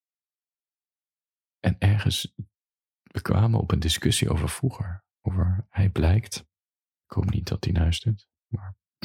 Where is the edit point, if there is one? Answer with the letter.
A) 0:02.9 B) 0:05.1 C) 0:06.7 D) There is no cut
B